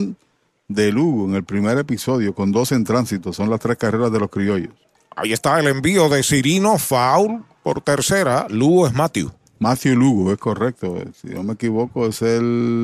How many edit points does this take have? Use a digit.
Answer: 0